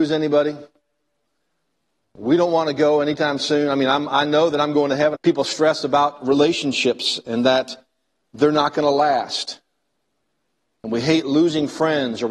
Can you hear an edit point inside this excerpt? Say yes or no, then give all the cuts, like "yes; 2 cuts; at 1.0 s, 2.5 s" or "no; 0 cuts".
yes; 1 cut; at 5.1 s